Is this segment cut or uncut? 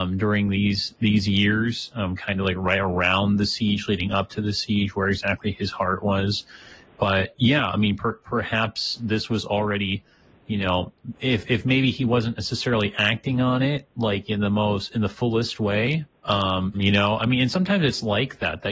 cut